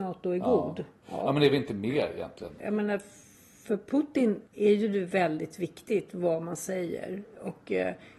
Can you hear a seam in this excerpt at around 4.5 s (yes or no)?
yes